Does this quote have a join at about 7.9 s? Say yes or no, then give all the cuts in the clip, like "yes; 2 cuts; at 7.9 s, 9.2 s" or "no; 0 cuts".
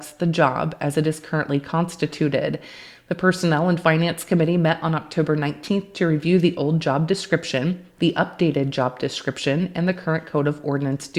no; 0 cuts